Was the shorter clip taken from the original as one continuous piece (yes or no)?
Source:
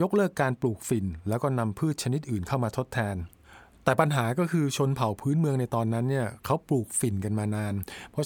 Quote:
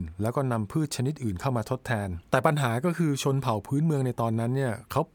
no